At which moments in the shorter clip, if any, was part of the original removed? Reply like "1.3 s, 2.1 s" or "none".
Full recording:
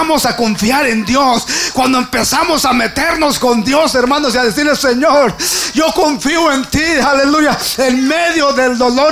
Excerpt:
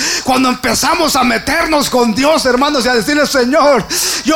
none